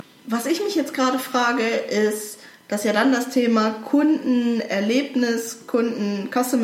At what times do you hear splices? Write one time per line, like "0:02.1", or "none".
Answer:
none